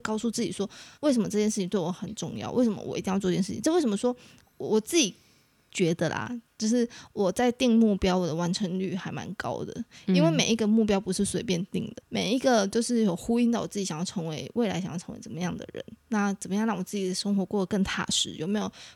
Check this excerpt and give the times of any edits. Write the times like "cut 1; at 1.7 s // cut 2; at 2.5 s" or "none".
cut 1; at 0.9 s